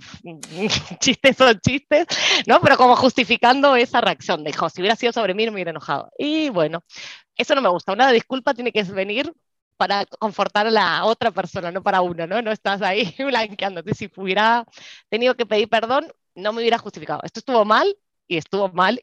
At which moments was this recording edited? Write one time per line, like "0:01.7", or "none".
none